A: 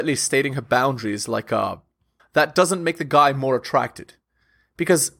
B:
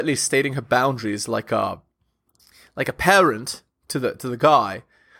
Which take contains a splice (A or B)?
A